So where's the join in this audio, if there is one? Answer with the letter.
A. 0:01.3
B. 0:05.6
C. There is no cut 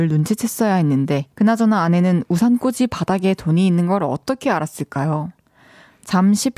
A